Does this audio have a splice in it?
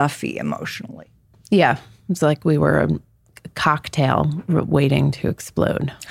no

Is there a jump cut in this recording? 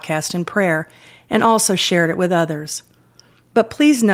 no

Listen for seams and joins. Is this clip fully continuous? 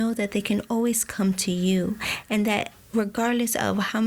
yes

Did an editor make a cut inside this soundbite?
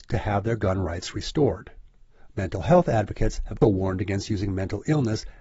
yes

